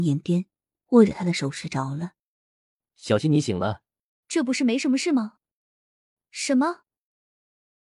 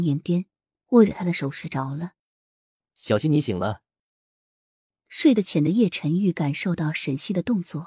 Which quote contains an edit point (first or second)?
first